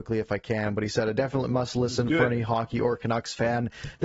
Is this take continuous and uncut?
yes; 0 cuts

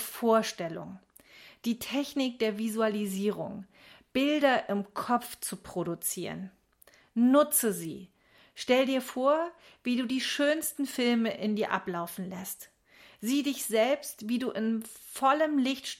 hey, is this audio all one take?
yes; 0 cuts

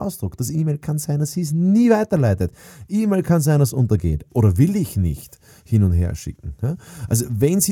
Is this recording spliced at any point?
yes; 1 cut; at 4.3 s

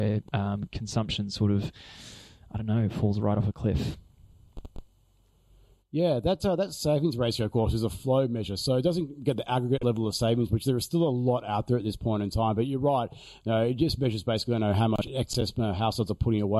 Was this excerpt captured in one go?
yes; 0 cuts

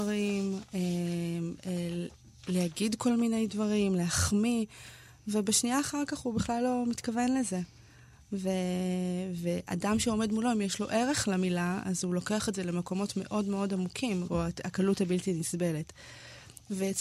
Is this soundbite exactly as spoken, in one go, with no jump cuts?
no; 1 cut; at 14.3 s

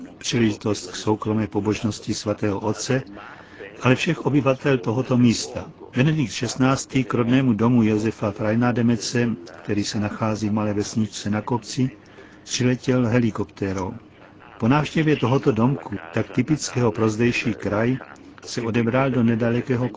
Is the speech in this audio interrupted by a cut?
no; 0 cuts

